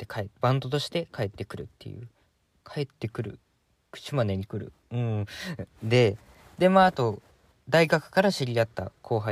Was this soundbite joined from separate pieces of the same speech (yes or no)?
no